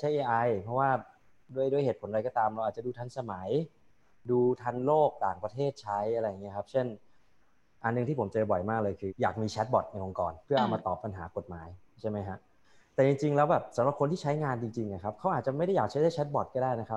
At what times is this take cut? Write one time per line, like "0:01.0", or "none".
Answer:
0:09.1
0:10.4

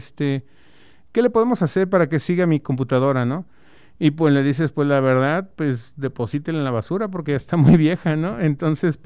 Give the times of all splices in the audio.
none

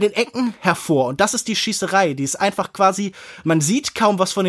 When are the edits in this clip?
none

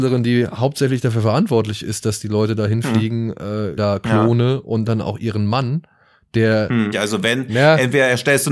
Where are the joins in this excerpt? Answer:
0:03.8
0:06.9

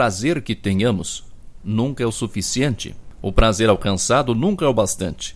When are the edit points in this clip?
0:01.6

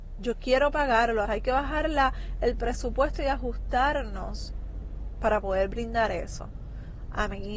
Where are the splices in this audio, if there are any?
0:01.2

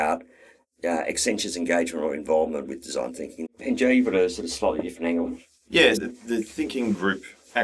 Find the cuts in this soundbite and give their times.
0:03.4
0:06.0

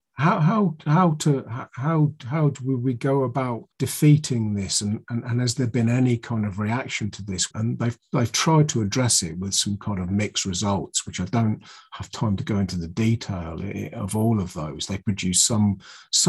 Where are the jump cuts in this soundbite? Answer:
0:03.7
0:07.5

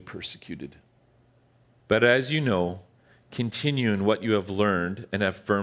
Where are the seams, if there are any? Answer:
0:01.8

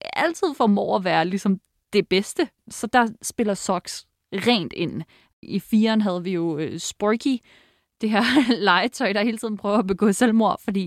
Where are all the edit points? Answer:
0:02.6

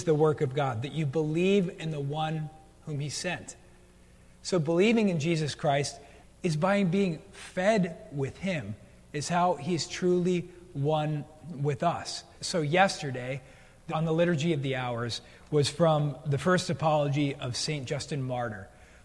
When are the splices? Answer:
0:06.2
0:12.3
0:13.9

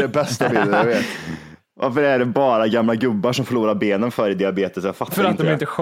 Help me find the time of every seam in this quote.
none

